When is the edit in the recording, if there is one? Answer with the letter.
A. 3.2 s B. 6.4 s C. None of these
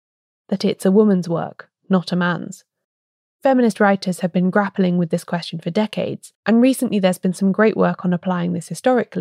B